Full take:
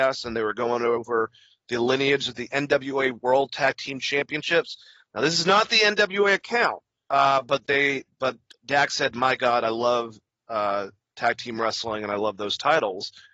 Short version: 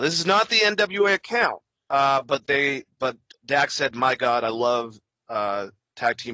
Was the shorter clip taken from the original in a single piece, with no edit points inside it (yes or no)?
yes